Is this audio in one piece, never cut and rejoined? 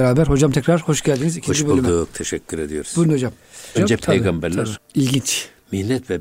no; 2 cuts; at 3.7 s, 4.8 s

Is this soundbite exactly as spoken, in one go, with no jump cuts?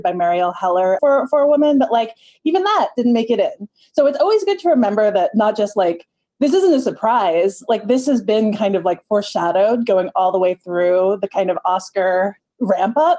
no; 1 cut; at 1.0 s

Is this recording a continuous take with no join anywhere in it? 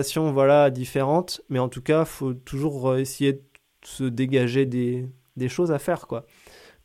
yes; 0 cuts

